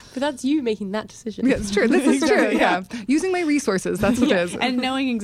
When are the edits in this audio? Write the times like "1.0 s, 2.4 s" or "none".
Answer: none